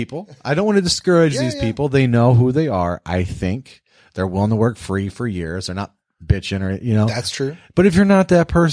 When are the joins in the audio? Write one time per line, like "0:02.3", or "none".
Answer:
none